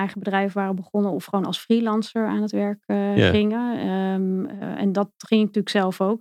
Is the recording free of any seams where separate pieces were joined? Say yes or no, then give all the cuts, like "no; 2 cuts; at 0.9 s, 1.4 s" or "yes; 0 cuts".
yes; 0 cuts